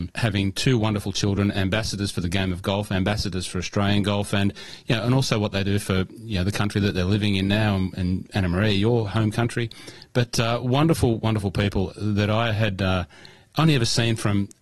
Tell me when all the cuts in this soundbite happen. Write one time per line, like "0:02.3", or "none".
none